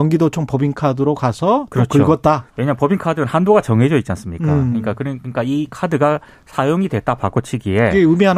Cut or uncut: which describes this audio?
uncut